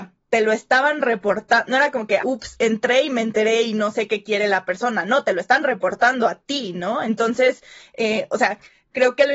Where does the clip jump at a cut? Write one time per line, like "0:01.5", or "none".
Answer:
0:02.2